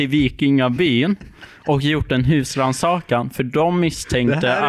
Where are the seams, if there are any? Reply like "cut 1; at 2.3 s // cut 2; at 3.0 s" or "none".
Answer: none